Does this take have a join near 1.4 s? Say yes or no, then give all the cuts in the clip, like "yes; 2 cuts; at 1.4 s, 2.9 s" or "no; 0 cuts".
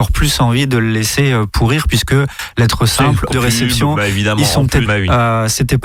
no; 2 cuts; at 3.3 s, 4.8 s